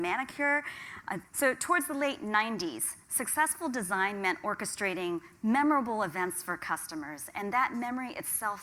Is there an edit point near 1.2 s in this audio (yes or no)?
yes